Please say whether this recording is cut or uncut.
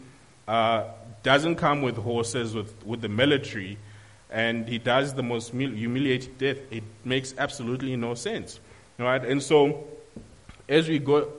uncut